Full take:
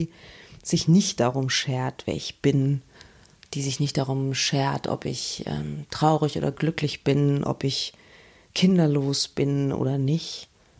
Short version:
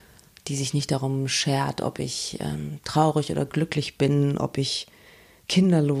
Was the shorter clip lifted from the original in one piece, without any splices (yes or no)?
yes